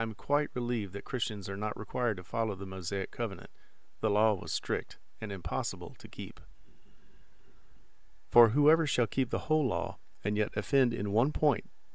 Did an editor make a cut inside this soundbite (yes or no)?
no